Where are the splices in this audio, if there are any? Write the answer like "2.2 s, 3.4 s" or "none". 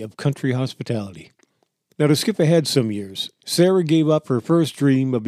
1.9 s, 3.4 s